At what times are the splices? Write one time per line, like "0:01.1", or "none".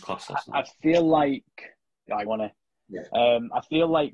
0:02.3